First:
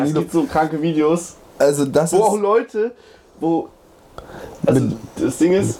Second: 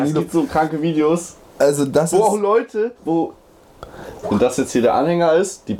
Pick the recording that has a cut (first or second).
second